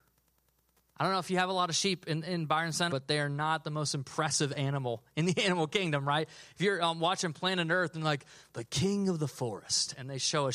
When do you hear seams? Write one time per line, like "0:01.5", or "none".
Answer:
0:02.9